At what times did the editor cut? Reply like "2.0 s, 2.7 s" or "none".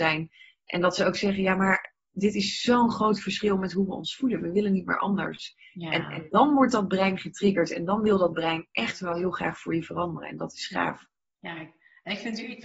none